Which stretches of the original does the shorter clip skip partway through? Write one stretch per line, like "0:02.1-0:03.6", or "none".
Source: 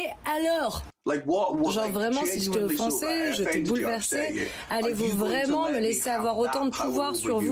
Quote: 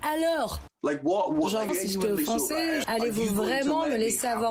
0:01.9-0:02.2
0:03.4-0:04.7